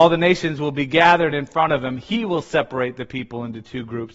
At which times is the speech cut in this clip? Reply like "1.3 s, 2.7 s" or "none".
none